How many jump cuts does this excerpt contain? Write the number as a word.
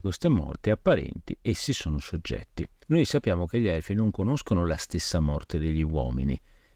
one